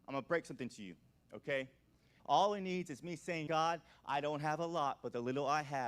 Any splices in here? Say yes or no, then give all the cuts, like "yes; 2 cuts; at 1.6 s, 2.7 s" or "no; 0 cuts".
yes; 2 cuts; at 2.2 s, 3.5 s